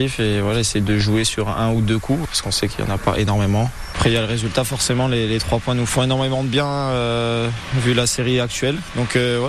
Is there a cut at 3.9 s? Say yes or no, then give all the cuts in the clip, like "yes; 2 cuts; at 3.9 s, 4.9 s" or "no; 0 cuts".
yes; 1 cut; at 3.9 s